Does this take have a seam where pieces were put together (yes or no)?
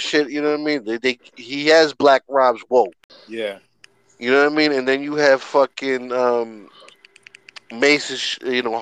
no